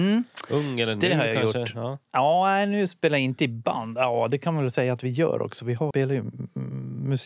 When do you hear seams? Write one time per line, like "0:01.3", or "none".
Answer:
0:05.9

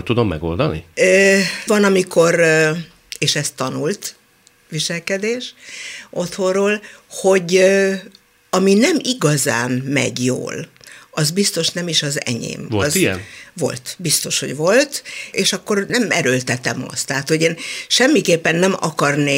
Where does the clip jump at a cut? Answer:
0:01.7

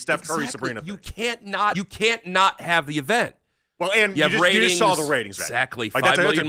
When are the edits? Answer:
0:01.7
0:03.8
0:05.4

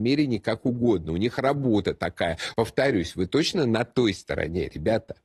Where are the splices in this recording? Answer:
0:02.5

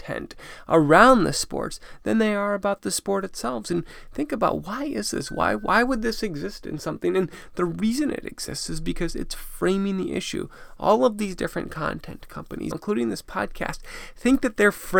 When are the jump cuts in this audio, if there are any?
0:12.7

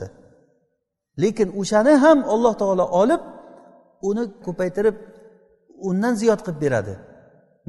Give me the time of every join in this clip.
0:04.4

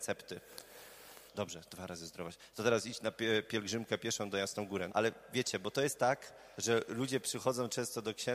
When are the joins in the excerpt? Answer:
0:01.3
0:04.9

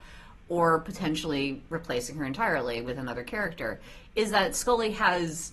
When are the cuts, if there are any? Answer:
none

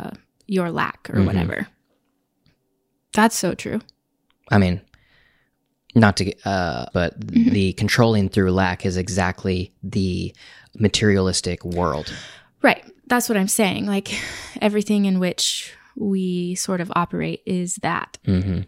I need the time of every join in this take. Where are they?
0:06.9

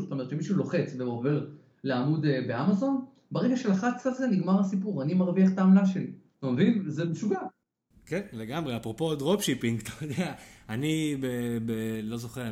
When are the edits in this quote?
none

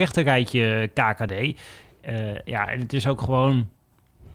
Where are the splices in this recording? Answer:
none

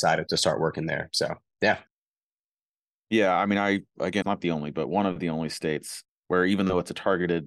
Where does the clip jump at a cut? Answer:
0:04.2

